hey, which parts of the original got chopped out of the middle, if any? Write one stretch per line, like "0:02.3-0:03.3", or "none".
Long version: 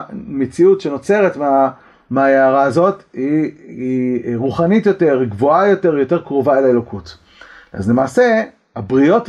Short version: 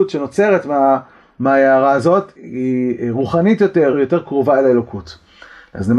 0:03.1-0:03.6
0:05.2-0:05.9